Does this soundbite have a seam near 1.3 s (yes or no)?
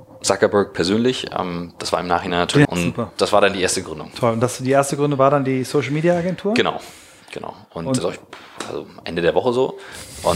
no